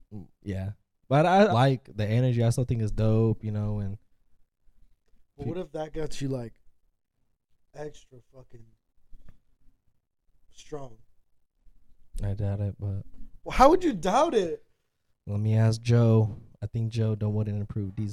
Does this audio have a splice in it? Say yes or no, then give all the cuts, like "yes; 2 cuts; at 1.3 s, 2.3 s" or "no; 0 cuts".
yes; 1 cut; at 1.5 s